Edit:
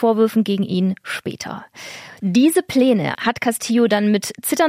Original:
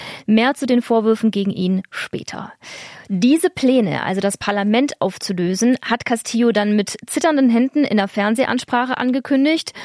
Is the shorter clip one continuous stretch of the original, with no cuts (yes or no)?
no